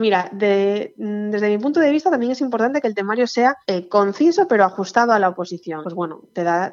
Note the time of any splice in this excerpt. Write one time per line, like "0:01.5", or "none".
0:03.6
0:05.8